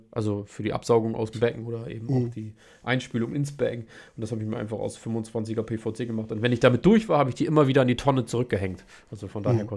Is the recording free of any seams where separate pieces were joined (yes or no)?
yes